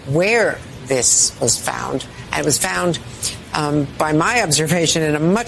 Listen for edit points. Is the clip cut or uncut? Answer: uncut